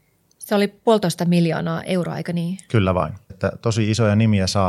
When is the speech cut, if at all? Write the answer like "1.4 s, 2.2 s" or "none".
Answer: 3.3 s